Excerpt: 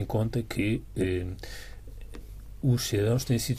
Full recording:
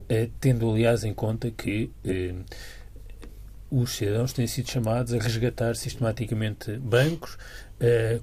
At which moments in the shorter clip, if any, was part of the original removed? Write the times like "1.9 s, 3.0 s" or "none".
none